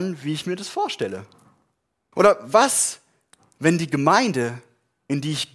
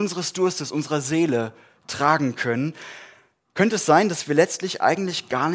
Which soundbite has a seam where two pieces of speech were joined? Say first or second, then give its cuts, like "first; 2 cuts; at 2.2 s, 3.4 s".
first; 1 cut; at 2.1 s